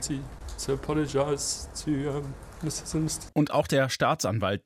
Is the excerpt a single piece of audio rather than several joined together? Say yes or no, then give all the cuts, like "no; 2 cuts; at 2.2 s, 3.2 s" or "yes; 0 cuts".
no; 1 cut; at 3.3 s